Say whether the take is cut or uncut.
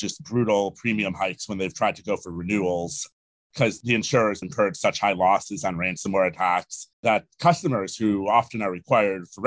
cut